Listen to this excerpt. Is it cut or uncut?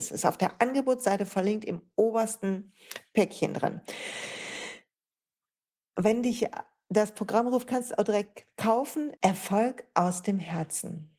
cut